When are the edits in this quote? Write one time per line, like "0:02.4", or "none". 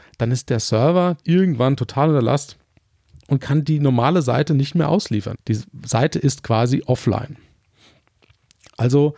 0:01.2
0:05.3